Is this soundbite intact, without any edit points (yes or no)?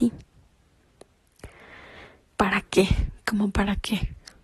no